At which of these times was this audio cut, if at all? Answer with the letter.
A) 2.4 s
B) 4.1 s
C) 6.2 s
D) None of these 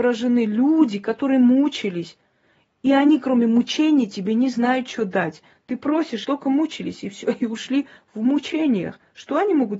C